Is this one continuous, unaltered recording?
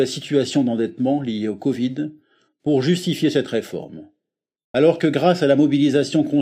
no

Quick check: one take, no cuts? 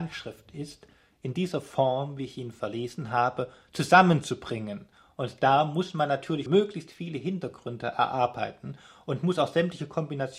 no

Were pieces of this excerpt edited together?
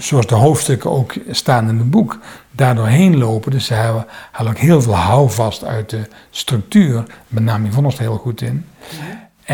no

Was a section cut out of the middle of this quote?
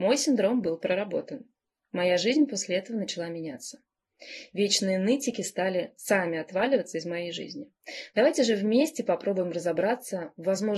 yes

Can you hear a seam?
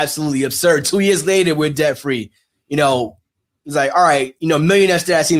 no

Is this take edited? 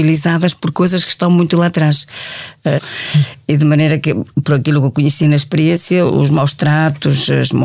yes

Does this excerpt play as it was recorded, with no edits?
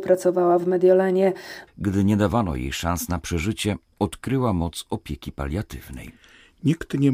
no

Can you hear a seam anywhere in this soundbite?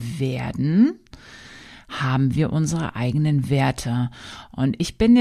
no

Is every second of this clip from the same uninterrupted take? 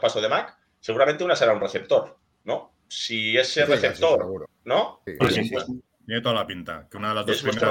no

